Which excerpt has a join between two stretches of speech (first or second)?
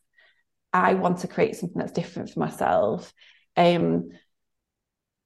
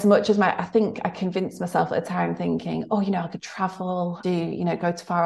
second